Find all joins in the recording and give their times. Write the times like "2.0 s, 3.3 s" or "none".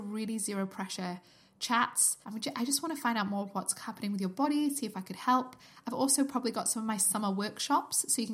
2.2 s